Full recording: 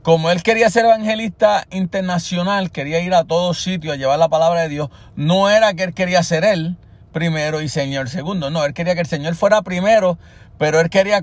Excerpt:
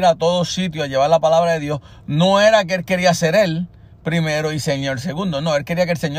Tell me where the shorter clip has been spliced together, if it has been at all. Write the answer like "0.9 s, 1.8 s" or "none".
none